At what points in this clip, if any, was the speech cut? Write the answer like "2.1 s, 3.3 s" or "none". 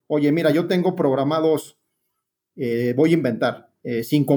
none